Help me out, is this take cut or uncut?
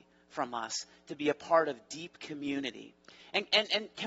uncut